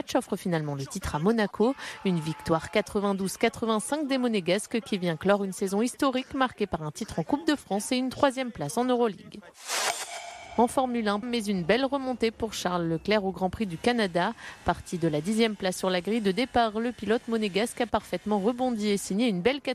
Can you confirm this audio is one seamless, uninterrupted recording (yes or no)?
no